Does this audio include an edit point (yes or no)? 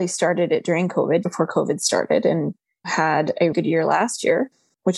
yes